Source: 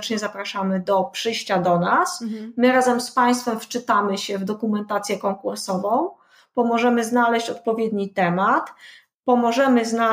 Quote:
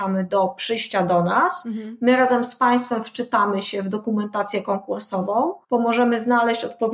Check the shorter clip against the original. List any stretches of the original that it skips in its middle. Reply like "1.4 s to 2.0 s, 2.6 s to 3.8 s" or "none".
6.2 s to 6.5 s